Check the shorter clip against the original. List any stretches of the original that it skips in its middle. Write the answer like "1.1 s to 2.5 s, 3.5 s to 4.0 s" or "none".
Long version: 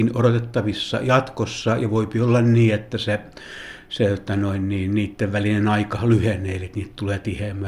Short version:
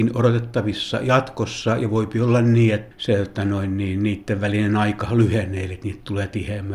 2.9 s to 3.8 s